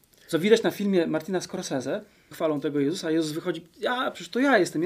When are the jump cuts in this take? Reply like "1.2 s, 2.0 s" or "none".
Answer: 2.3 s